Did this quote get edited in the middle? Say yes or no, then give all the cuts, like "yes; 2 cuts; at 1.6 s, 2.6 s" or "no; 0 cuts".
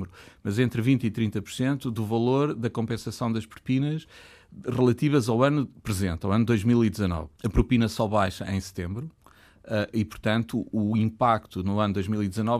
no; 0 cuts